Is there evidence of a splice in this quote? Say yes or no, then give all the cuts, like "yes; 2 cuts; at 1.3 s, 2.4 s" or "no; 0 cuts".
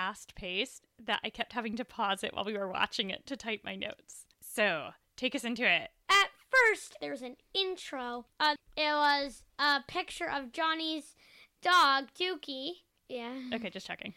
yes; 2 cuts; at 8.6 s, 13.0 s